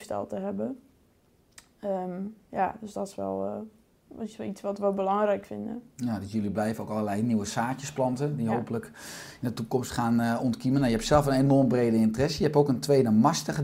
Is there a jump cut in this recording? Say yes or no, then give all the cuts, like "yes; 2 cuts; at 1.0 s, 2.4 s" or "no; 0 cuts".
no; 0 cuts